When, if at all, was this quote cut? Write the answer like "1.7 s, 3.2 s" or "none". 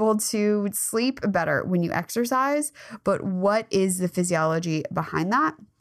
none